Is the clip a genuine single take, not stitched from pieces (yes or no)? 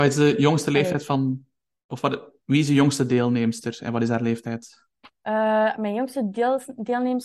yes